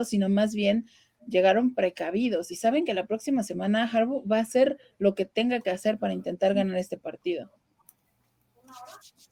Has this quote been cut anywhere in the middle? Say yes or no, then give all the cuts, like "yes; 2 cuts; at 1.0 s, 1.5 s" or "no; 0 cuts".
no; 0 cuts